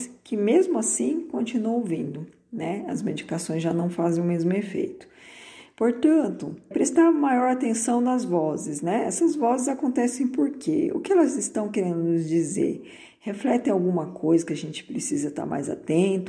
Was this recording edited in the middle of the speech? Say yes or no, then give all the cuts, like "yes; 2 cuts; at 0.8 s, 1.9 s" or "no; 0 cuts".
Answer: yes; 1 cut; at 6.7 s